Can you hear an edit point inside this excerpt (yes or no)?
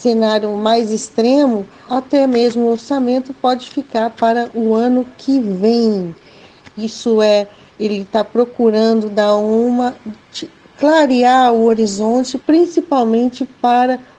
yes